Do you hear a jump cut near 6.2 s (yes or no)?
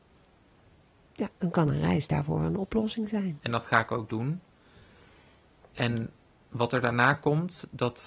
no